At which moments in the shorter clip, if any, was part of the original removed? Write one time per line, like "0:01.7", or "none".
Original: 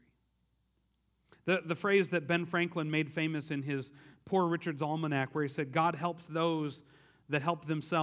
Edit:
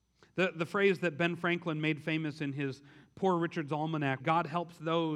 0:04.2